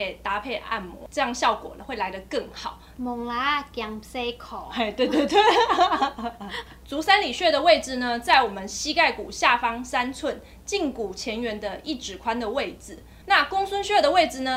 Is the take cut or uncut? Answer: cut